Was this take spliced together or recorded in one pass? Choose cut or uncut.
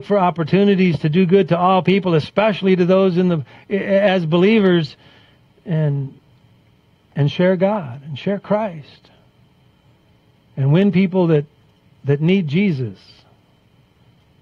uncut